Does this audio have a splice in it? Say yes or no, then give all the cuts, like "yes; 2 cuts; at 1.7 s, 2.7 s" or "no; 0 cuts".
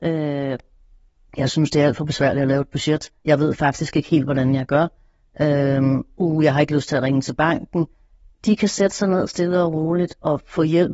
no; 0 cuts